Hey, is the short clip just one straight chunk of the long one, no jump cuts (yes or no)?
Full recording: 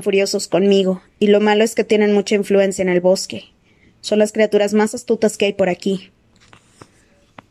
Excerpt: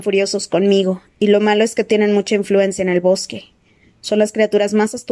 yes